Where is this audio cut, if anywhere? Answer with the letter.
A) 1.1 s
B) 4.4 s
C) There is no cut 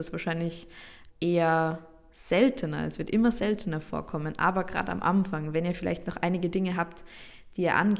A